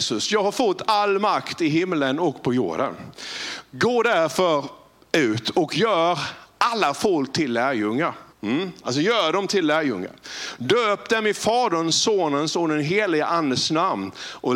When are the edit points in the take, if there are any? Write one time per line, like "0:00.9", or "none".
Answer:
0:08.3